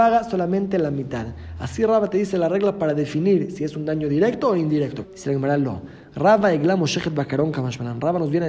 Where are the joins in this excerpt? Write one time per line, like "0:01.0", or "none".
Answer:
0:05.0